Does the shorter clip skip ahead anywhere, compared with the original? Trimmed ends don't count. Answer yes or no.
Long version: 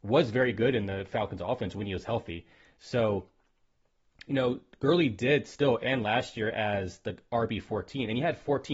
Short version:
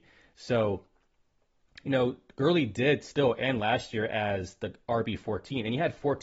no